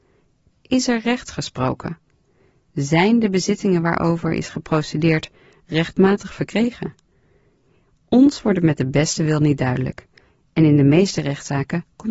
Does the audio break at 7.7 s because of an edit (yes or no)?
no